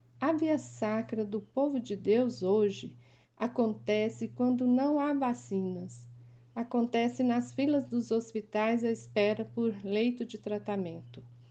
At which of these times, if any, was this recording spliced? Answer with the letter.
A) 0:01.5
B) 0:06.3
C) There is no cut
C